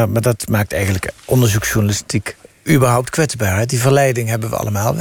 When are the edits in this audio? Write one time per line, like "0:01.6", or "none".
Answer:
none